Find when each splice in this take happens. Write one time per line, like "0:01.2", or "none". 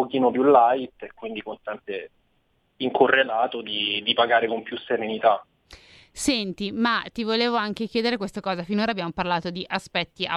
none